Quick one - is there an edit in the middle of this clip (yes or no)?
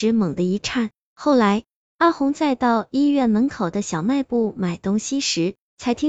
yes